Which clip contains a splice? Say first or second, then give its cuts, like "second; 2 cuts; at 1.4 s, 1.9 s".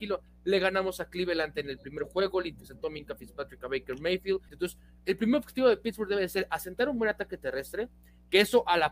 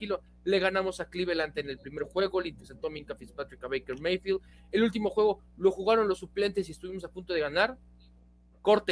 first; 1 cut; at 4.5 s